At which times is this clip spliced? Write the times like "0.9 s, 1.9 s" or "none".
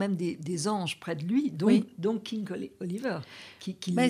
none